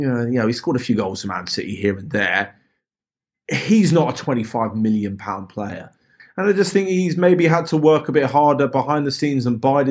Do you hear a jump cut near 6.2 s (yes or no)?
yes